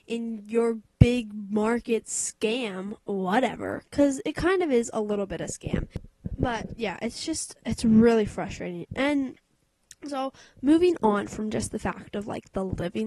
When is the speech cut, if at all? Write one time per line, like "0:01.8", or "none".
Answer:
none